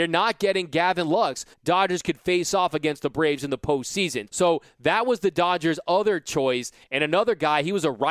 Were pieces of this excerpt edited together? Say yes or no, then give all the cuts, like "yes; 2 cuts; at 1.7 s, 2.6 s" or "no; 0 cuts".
yes; 2 cuts; at 1.5 s, 4.3 s